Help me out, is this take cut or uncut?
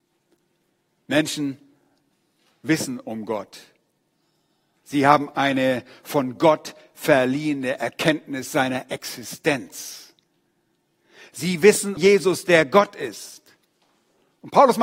cut